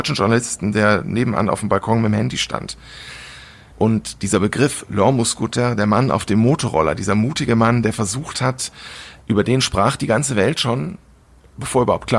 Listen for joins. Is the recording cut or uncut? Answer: cut